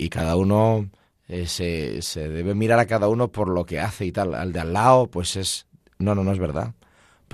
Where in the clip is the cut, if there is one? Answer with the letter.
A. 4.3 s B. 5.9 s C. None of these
C